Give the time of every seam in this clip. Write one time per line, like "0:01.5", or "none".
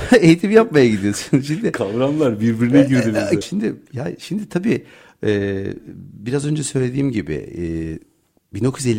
0:03.4